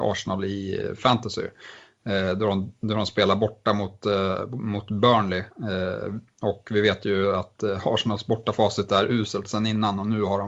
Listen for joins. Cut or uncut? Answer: uncut